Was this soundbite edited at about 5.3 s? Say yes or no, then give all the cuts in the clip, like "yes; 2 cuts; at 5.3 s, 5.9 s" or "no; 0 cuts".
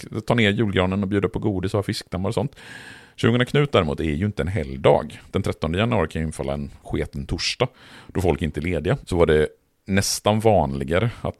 no; 1 cut; at 9.0 s